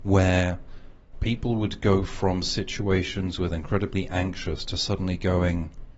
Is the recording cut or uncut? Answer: cut